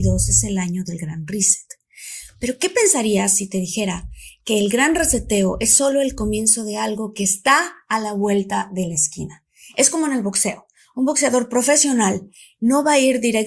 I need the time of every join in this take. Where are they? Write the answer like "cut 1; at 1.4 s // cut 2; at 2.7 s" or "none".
none